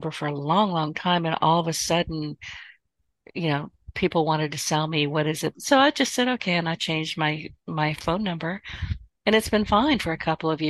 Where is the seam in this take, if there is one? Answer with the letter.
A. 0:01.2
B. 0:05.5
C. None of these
B